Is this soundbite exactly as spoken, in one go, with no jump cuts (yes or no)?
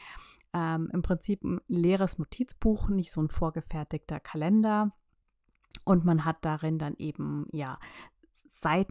yes